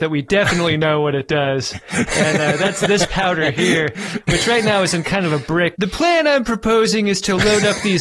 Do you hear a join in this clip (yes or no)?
yes